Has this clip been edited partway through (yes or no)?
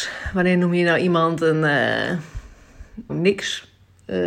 yes